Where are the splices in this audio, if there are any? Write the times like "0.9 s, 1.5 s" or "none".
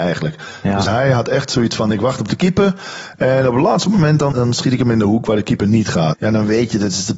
4.3 s, 6.1 s